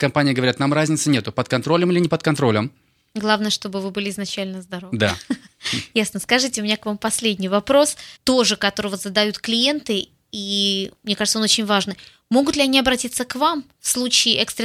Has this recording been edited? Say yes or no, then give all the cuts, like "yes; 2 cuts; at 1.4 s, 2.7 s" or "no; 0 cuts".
yes; 1 cut; at 8.2 s